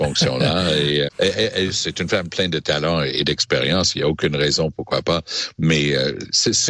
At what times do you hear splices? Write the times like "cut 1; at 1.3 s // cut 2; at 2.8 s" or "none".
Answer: cut 1; at 1.1 s